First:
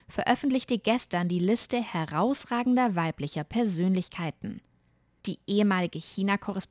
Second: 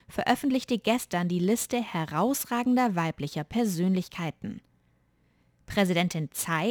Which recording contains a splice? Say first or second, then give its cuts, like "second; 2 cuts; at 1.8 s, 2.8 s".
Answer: first; 1 cut; at 5.2 s